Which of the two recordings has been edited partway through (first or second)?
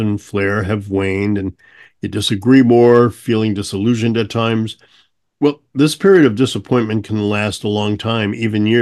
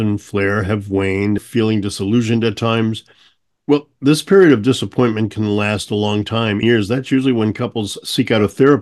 second